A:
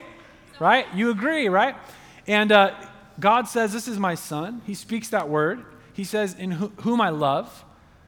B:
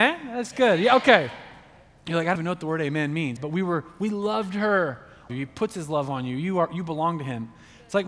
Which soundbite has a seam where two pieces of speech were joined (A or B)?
B